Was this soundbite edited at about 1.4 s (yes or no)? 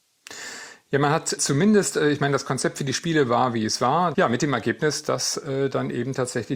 yes